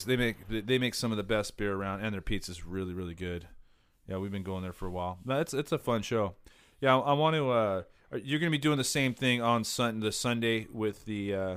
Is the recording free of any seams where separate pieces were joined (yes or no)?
yes